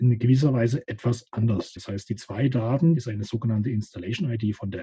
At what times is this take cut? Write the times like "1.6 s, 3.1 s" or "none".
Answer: 1.8 s, 3.0 s